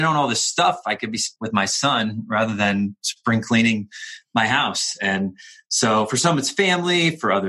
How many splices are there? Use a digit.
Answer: 1